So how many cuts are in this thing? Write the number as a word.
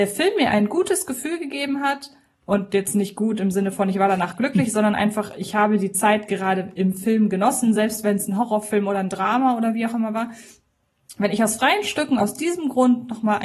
zero